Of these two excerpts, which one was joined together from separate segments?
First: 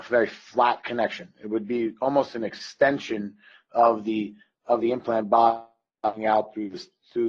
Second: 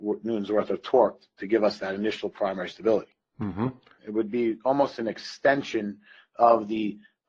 second; 1 cut; at 4.0 s

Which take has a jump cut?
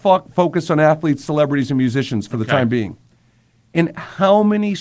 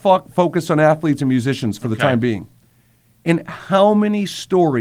second; 1 cut; at 1.2 s

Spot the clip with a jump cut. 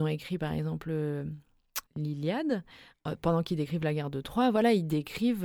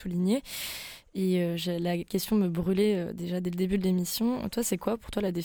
first; 1 cut; at 1.9 s

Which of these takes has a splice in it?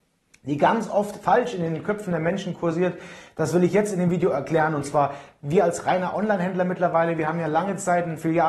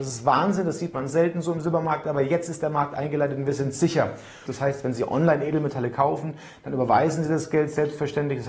second; 1 cut; at 4.5 s

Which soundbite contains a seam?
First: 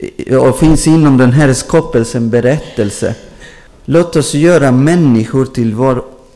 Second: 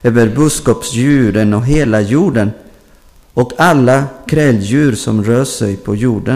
first; 1 cut; at 3.7 s

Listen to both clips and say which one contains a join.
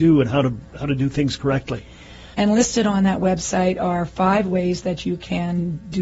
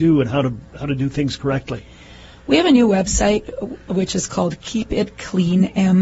first; 1 cut; at 2.3 s

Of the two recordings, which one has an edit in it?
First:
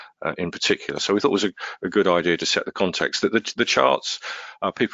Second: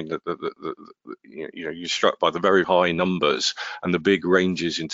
second; 1 cut; at 2.6 s

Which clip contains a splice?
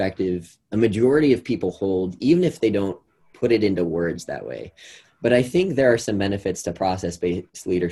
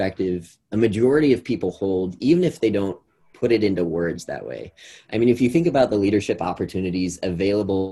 first; 1 cut; at 5.0 s

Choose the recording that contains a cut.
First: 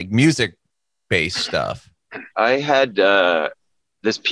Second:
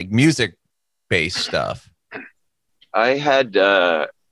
first; 1 cut; at 2.3 s

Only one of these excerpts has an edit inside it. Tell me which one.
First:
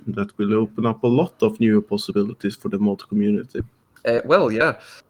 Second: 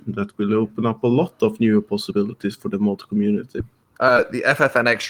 second; 1 cut; at 4.0 s

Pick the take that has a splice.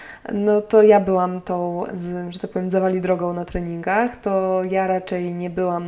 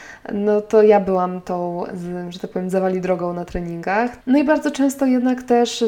second; 1 cut; at 4.2 s

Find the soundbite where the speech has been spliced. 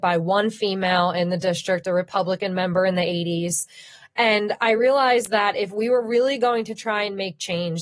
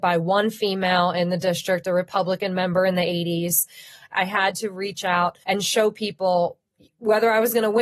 second; 2 cuts; at 4.1 s, 5.4 s

